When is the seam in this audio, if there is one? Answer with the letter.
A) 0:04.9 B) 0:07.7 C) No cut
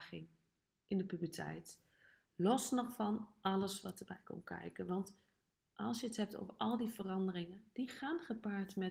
C